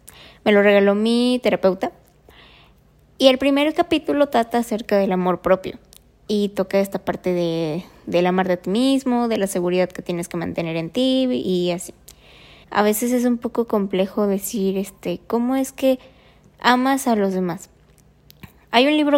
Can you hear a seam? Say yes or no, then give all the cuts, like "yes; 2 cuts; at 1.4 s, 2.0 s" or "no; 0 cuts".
yes; 1 cut; at 12.6 s